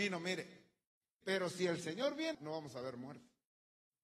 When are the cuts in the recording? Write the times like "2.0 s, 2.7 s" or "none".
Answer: 1.2 s, 2.3 s